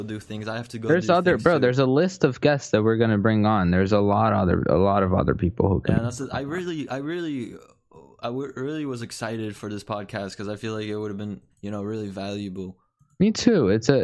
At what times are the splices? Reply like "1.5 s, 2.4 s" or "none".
11.5 s